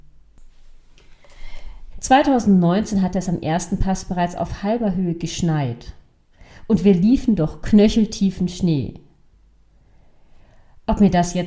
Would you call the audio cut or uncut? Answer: cut